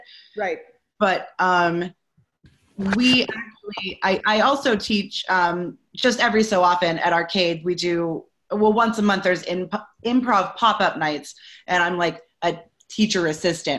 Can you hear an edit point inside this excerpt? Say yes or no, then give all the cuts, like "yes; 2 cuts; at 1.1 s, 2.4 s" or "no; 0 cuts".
no; 0 cuts